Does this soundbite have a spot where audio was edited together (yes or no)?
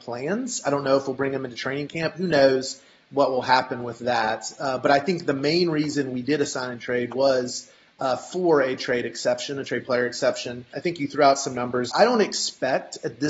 yes